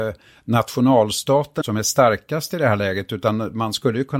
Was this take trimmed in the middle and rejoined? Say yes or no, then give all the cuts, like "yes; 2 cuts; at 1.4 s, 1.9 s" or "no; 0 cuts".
yes; 1 cut; at 1.6 s